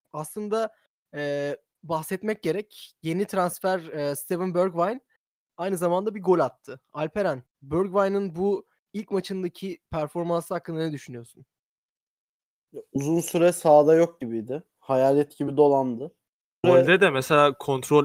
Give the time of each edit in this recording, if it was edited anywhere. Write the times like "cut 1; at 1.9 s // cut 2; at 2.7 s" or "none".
cut 1; at 7.5 s // cut 2; at 16.6 s